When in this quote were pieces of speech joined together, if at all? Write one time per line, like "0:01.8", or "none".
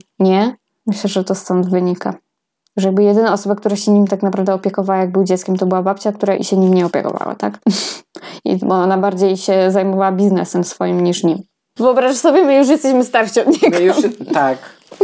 0:06.4
0:11.8